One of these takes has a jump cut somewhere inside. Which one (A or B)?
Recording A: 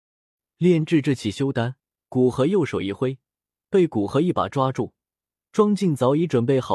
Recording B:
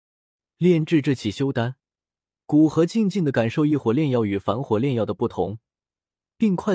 A